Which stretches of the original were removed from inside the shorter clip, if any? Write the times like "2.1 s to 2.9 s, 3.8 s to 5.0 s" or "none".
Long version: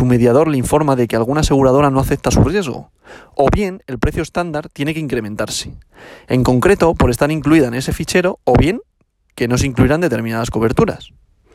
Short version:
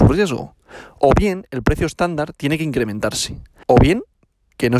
6.0 s to 8.4 s